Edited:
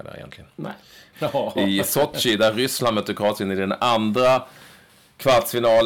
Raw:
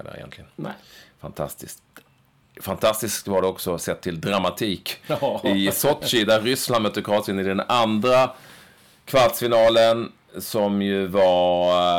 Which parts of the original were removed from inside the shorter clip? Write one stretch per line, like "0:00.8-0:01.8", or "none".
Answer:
0:01.1-0:05.0